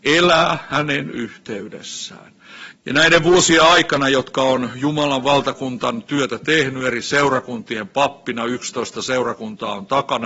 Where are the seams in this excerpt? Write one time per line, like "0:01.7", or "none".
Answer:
0:02.7